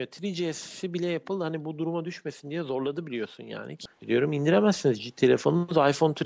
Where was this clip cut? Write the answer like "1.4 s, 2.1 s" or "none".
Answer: 3.9 s

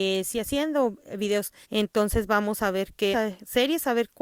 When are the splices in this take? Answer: 1.6 s, 3.1 s

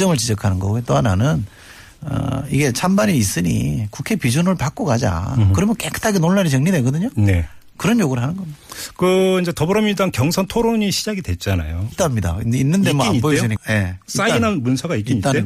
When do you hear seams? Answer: 11.9 s, 13.6 s

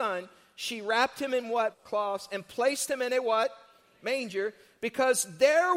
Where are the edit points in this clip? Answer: 1.7 s

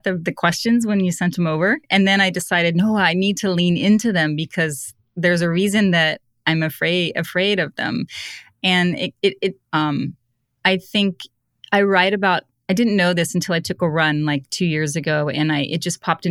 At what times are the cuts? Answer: 9.6 s

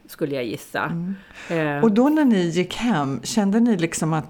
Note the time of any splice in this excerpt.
none

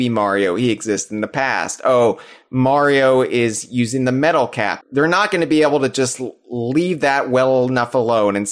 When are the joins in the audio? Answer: 4.8 s

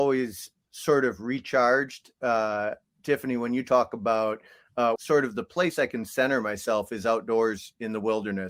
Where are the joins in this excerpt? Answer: 5.0 s

